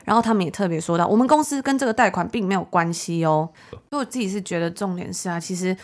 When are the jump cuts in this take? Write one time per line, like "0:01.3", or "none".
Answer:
0:03.7